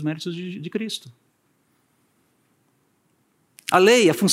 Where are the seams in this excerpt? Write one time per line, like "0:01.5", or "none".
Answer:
none